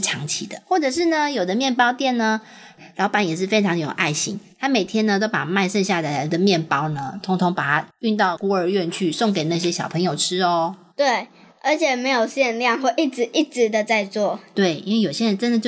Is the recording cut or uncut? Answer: cut